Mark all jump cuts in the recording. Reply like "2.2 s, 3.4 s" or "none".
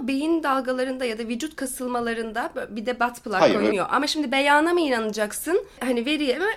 3.7 s